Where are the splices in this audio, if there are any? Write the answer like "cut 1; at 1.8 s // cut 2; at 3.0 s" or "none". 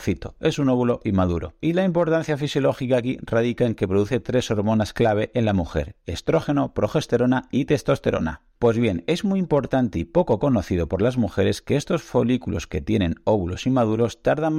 cut 1; at 1.6 s